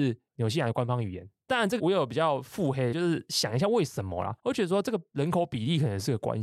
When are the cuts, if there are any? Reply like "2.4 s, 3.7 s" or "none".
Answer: 1.8 s, 2.9 s, 4.4 s